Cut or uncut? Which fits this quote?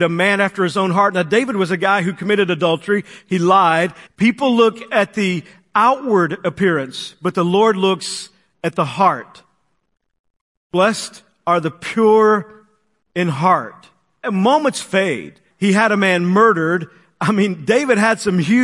cut